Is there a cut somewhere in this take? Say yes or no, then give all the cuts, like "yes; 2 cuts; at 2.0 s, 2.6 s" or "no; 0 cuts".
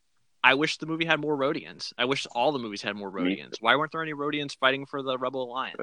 no; 0 cuts